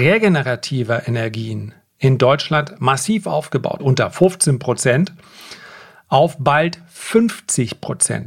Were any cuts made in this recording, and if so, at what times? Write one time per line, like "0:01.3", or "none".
0:03.8